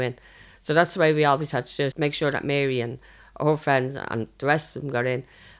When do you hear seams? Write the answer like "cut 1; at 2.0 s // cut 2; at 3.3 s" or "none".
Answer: cut 1; at 1.9 s